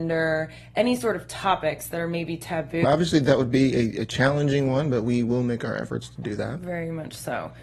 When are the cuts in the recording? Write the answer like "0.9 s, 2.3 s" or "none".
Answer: 2.8 s